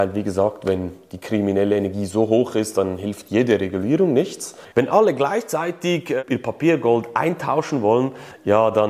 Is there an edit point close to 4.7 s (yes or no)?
yes